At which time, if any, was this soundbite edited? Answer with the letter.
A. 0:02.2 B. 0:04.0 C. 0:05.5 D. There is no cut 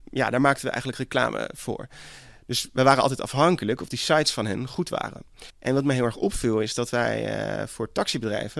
C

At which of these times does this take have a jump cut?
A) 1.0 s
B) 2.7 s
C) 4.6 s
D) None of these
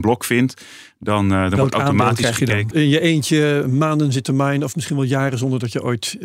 B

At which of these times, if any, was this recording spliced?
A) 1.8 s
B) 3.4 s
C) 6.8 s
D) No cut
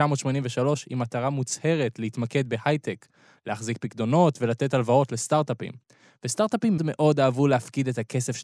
C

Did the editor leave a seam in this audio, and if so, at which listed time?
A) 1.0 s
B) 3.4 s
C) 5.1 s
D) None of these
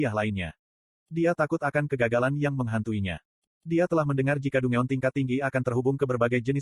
B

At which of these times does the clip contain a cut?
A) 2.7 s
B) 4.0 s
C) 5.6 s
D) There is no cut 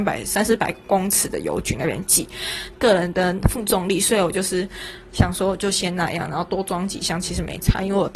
A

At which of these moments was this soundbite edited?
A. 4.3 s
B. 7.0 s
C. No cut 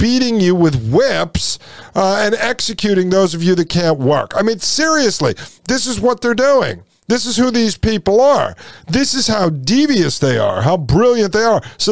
C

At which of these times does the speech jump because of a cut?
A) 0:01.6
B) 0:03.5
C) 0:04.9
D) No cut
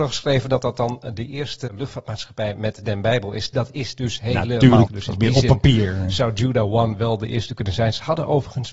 C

